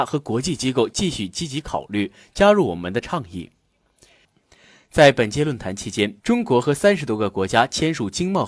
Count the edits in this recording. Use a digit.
2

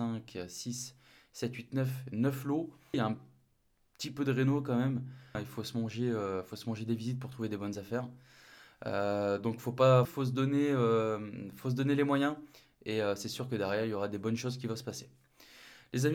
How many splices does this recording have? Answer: 3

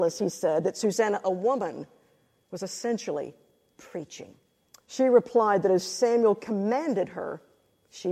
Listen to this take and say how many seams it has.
1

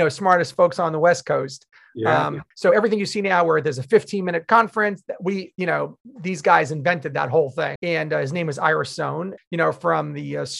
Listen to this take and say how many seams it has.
3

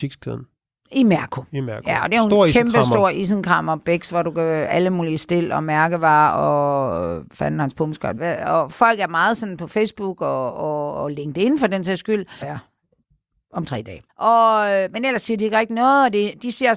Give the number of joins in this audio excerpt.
3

